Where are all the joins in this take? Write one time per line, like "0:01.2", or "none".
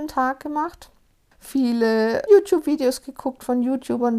0:02.3